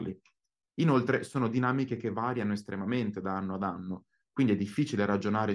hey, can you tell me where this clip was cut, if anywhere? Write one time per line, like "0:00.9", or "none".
none

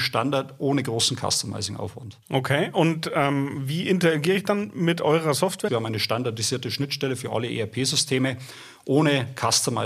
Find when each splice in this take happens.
0:02.2
0:05.7

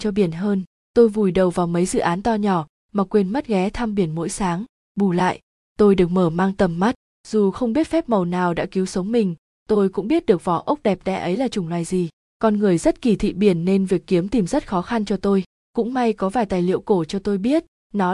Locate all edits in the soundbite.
none

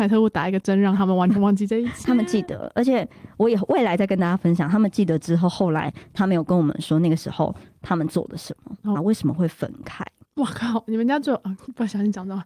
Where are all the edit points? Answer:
0:08.9
0:10.2

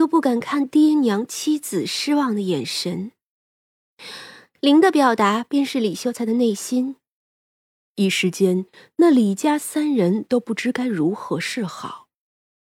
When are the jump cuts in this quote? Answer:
none

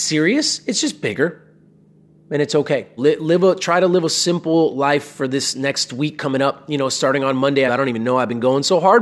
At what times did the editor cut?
0:03.0
0:07.7

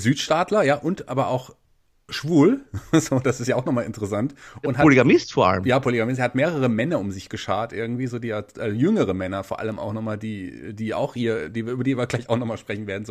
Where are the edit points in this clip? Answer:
none

